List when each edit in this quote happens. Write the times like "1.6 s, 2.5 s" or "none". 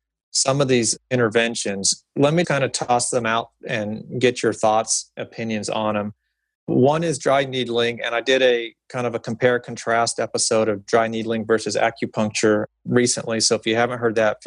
2.4 s